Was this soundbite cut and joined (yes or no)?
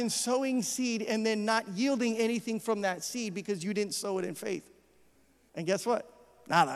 yes